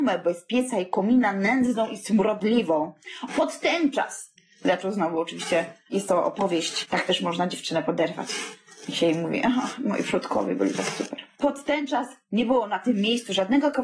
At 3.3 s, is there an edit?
yes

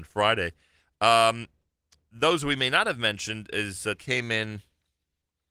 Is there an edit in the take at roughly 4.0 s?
yes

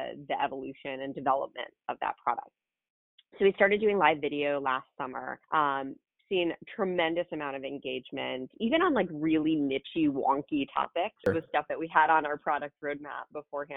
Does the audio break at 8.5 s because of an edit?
no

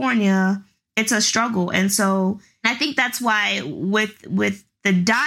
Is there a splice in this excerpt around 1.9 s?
no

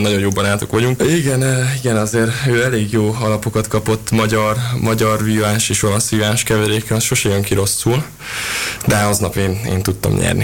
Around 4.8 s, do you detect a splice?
no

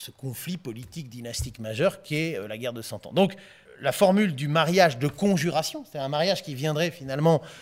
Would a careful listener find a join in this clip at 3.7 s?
yes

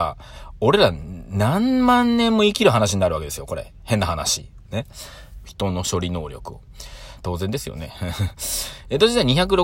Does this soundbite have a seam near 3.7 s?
no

